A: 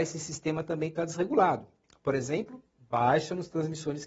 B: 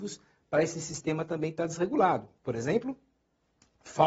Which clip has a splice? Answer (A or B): B